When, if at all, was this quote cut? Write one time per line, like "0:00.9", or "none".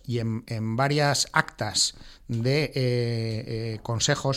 none